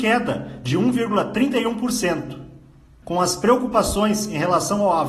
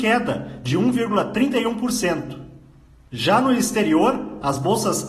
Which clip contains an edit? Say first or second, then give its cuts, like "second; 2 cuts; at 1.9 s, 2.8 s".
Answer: first; 1 cut; at 3.0 s